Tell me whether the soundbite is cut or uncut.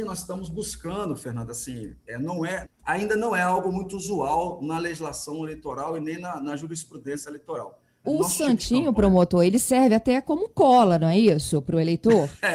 cut